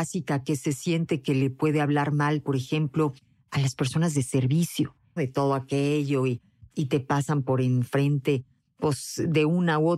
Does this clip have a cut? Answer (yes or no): yes